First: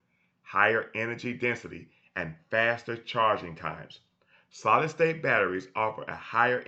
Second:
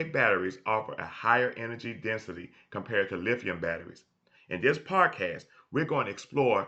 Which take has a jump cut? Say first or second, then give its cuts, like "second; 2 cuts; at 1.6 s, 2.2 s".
second; 1 cut; at 4.4 s